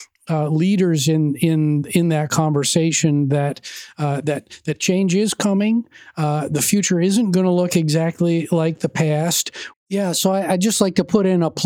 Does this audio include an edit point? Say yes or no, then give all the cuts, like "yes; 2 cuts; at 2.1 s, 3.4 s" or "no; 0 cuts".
yes; 1 cut; at 9.7 s